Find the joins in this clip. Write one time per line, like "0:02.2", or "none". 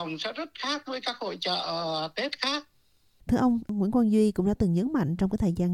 0:03.2

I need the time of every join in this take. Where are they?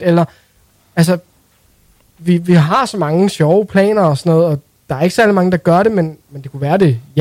none

